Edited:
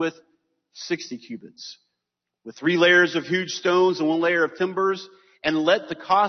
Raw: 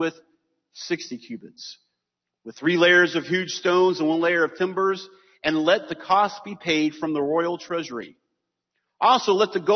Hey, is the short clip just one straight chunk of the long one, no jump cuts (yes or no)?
yes